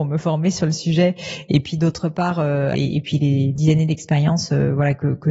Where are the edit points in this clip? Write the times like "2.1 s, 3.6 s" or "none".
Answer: 2.7 s

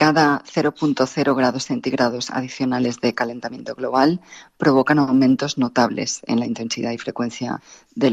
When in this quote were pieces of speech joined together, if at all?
none

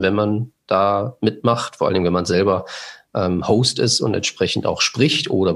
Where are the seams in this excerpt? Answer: none

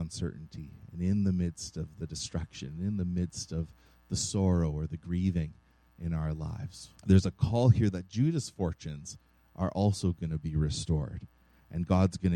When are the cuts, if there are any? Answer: 7.0 s

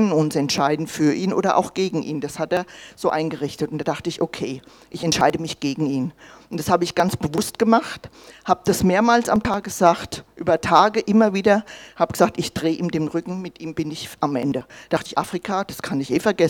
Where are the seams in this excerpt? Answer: none

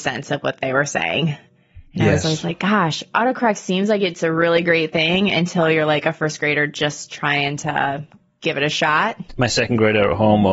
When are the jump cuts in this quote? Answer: none

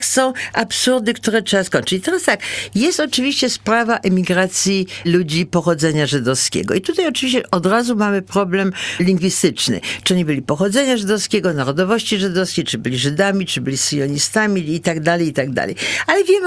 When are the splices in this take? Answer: none

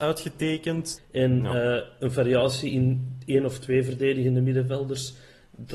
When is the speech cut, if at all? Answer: 1.0 s

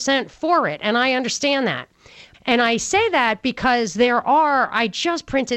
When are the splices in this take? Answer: 2.3 s

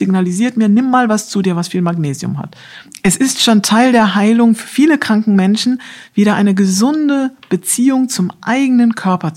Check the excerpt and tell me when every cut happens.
none

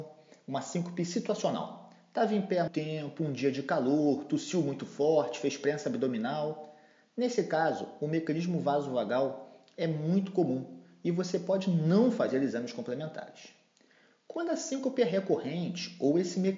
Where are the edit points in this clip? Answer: 2.7 s

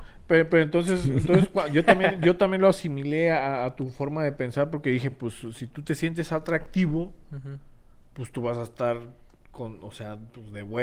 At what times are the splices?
none

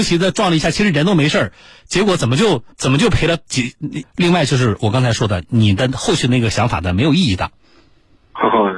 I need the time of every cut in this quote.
2.7 s, 4.0 s

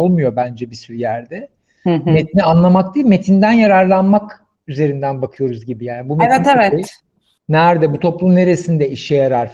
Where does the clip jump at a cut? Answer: none

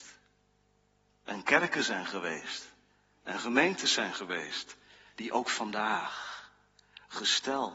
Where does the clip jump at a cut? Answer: 5.1 s

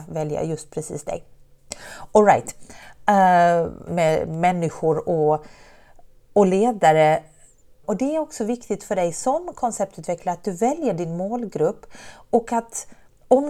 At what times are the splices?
3.9 s, 7.8 s

